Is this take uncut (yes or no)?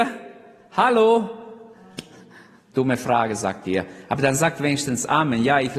yes